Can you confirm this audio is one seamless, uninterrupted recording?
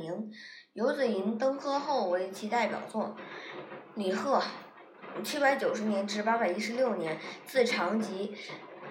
yes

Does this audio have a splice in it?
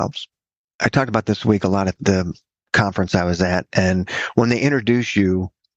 no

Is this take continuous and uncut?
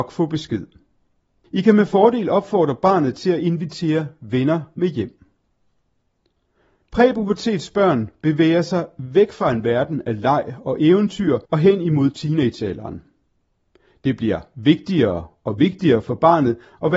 no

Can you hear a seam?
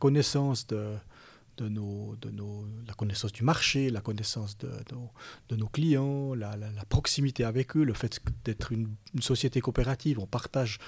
no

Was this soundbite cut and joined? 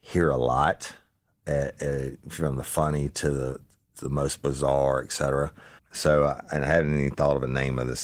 yes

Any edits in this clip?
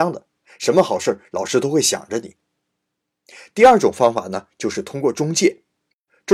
no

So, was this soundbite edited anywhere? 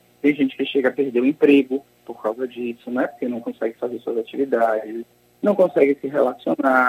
no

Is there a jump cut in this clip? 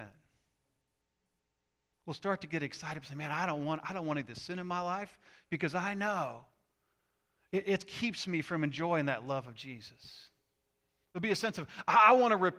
no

